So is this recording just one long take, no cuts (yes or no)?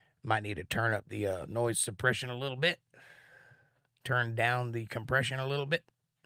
yes